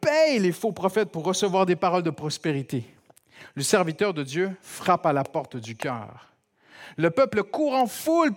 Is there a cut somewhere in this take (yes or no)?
no